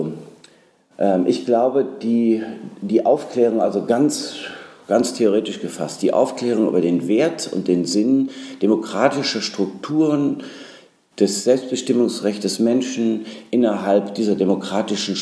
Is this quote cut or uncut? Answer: uncut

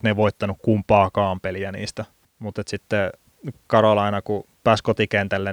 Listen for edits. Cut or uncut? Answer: uncut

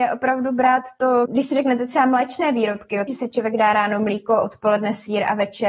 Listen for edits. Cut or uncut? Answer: cut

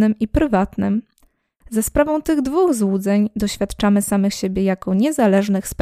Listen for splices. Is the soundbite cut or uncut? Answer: uncut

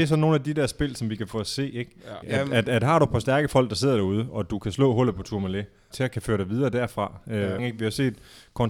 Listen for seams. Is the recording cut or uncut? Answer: cut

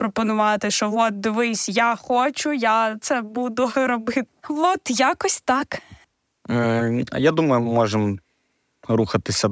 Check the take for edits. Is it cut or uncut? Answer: cut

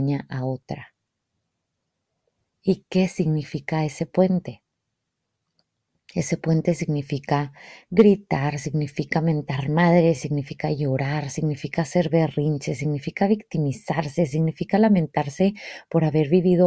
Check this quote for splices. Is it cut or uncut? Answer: uncut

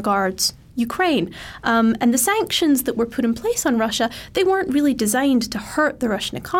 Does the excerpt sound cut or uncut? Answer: uncut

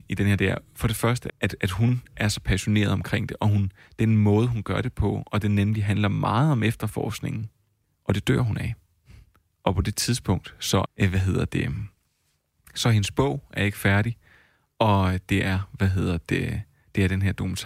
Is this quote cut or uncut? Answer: cut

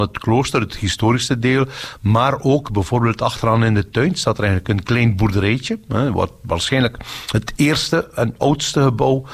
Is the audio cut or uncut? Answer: uncut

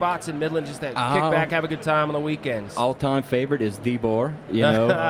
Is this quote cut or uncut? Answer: uncut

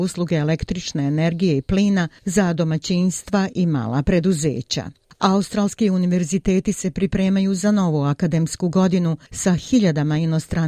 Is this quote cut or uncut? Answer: uncut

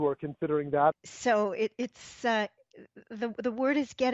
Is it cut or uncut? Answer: cut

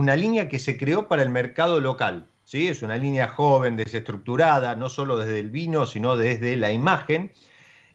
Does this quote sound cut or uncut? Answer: uncut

